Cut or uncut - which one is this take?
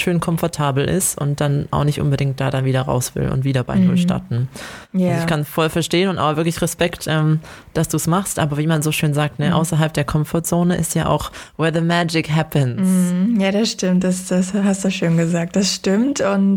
uncut